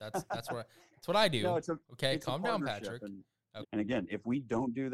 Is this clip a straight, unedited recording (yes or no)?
no